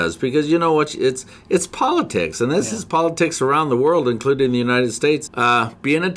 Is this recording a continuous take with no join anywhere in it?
no; 1 cut; at 5.3 s

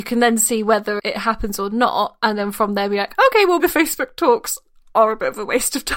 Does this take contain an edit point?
yes; 2 cuts; at 1.0 s, 3.6 s

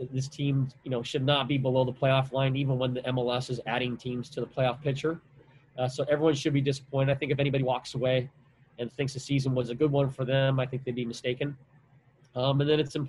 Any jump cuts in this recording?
no; 0 cuts

